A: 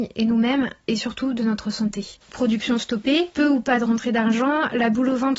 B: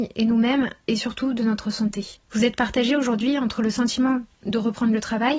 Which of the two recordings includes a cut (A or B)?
A